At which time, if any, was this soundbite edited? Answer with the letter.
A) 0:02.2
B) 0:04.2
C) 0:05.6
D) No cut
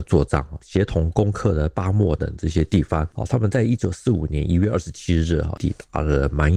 A